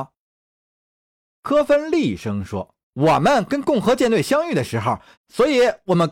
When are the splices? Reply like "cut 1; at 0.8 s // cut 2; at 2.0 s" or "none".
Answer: cut 1; at 1.0 s // cut 2; at 2.8 s // cut 3; at 5.2 s